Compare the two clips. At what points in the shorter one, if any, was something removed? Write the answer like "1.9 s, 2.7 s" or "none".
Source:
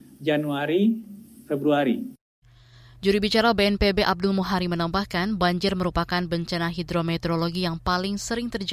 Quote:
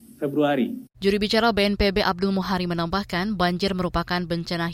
0.9 s

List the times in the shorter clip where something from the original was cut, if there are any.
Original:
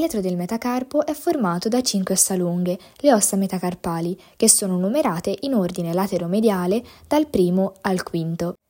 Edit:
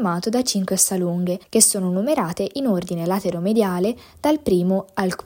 1.4 s

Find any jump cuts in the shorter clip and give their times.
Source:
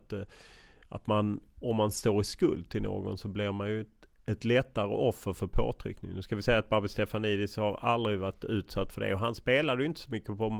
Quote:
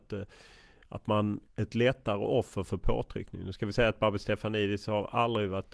1.4 s

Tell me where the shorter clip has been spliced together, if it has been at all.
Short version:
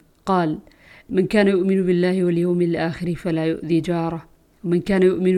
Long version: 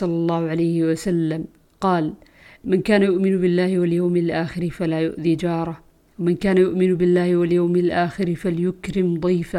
none

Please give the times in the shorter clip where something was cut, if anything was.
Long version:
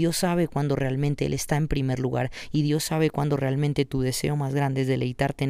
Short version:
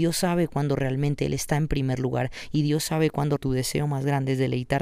3.4 s

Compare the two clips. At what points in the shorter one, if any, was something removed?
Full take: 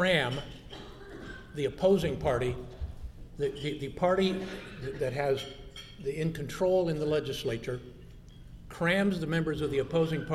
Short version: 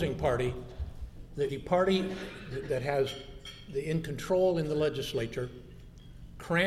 1.5 s

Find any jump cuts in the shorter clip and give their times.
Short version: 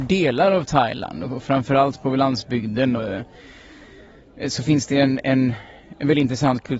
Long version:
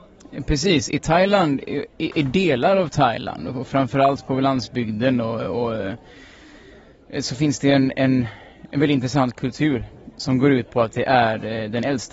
3.0 s

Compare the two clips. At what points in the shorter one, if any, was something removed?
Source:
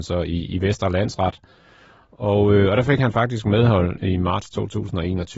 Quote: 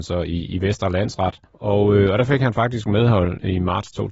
1.5 s

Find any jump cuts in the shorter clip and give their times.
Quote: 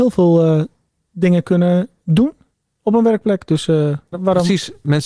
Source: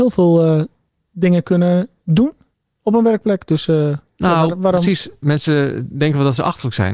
4.1 s

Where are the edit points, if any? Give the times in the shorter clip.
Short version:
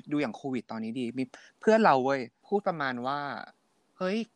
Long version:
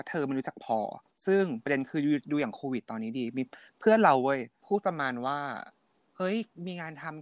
none

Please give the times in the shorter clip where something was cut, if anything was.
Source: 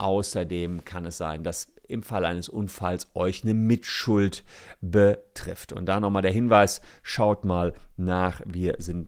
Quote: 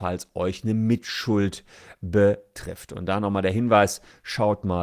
none

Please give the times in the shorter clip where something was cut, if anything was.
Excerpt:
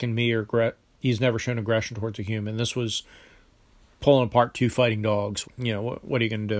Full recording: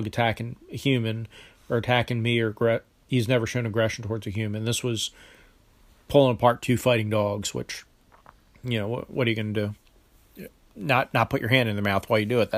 5.4 s

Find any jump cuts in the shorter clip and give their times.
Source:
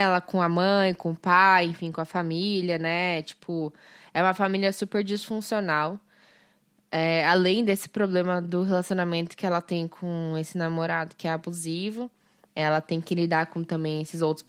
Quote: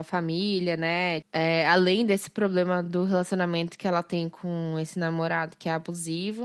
1.2 s

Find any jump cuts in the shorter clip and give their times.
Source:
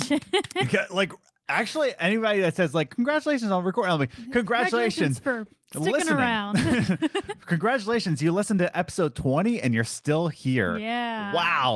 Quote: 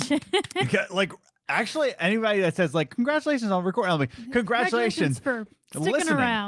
none

